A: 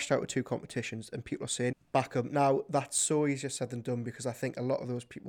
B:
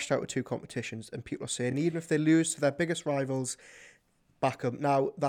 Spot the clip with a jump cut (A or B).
A